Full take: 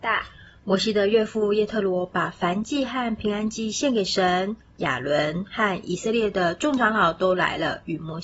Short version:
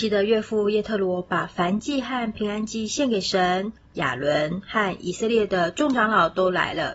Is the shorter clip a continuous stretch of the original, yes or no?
yes